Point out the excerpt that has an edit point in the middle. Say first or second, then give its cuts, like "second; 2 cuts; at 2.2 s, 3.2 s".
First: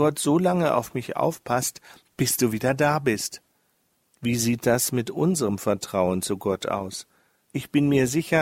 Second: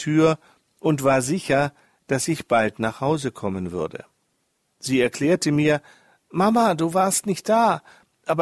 first; 2 cuts; at 4.0 s, 7.4 s